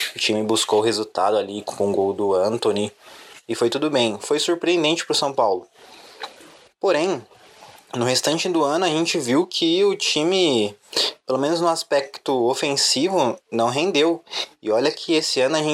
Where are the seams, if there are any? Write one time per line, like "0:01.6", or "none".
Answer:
none